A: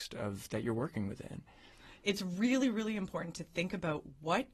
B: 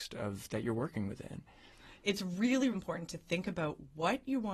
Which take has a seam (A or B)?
B